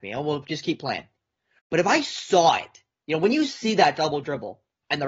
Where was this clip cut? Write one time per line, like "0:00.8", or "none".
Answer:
none